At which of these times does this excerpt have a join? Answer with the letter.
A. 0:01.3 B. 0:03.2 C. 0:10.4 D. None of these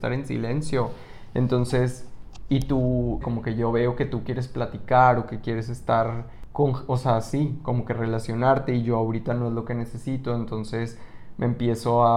B